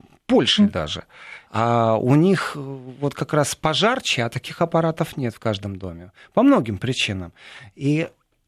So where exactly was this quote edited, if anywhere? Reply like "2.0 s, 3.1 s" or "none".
1.5 s